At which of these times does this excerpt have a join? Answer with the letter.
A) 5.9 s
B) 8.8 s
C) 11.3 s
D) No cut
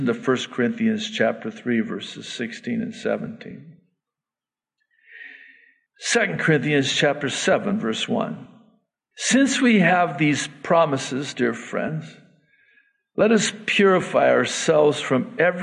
A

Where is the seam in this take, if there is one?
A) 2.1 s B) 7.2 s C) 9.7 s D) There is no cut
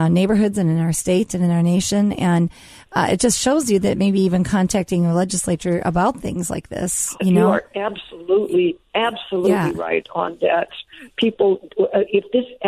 B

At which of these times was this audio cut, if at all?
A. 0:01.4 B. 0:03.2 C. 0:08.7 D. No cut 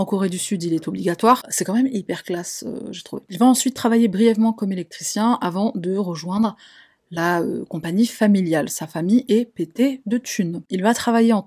A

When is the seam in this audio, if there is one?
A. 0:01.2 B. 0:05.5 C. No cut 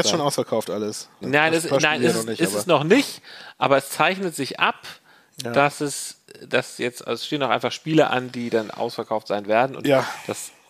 A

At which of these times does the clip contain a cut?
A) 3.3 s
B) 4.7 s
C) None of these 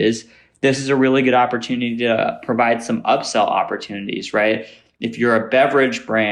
C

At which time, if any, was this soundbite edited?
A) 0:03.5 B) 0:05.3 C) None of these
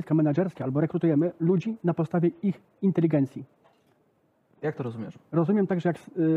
C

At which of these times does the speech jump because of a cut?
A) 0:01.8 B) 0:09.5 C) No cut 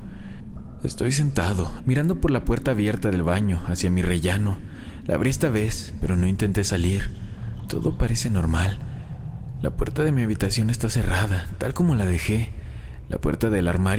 A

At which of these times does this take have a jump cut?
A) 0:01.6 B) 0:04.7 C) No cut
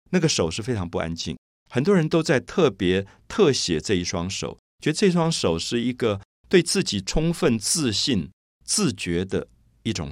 A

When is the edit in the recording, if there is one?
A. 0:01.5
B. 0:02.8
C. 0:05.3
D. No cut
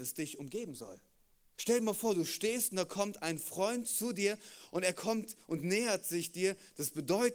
A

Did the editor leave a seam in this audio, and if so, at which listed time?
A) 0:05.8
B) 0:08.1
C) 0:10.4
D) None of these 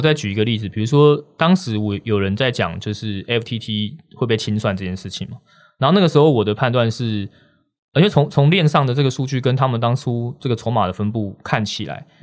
B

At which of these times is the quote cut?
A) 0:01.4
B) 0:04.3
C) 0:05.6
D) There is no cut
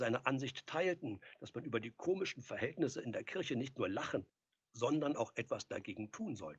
D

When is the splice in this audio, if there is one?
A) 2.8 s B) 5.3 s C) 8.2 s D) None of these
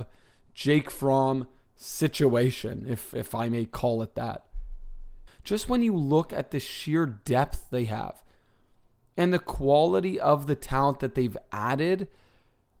B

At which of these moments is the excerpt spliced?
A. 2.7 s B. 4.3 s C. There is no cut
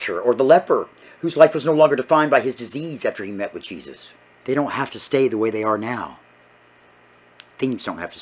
B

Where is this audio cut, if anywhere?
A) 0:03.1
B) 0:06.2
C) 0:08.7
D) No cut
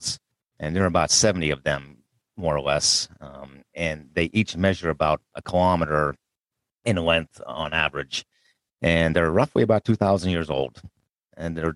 D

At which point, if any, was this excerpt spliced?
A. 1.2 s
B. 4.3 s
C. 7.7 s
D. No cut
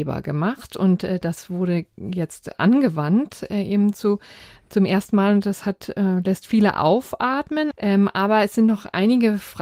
C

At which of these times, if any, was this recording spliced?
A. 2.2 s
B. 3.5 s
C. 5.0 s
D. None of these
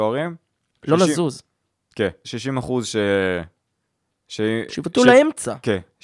A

